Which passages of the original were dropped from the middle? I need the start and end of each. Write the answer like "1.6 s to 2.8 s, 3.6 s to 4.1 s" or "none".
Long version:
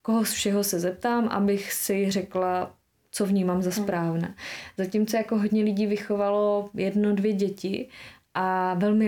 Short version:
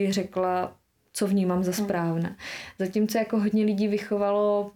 none